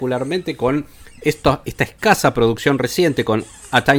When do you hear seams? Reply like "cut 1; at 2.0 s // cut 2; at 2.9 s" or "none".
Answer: cut 1; at 1.6 s